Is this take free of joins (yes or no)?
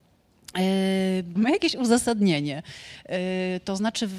no